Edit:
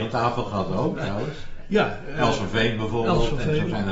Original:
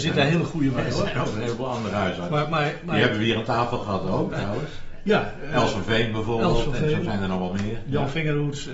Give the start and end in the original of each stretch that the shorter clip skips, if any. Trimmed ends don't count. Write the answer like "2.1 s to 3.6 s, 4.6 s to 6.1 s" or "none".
none